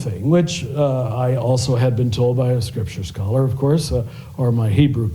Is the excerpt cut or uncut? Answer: uncut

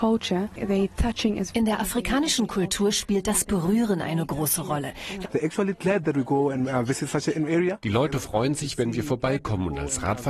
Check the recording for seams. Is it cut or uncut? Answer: cut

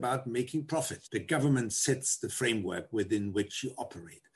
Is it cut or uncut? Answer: cut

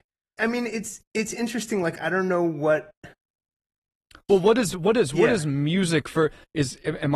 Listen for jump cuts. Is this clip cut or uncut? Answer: uncut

